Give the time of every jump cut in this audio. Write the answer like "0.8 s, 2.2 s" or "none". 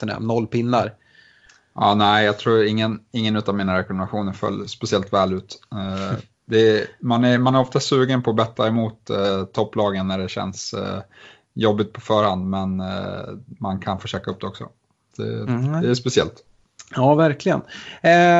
15.1 s